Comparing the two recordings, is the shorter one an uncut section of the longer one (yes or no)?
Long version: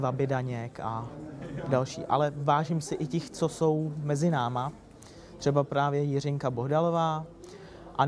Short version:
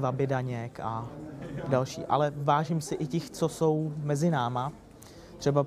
yes